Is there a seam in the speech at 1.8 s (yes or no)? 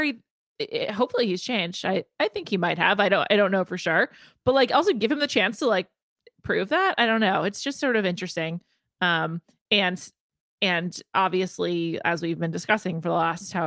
no